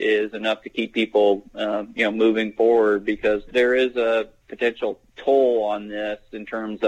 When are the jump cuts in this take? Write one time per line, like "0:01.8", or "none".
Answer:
0:03.5
0:05.1